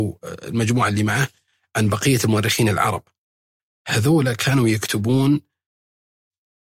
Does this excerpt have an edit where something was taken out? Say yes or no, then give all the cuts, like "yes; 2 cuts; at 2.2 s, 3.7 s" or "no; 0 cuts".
no; 0 cuts